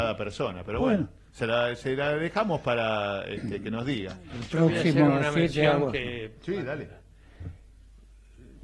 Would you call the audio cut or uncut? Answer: uncut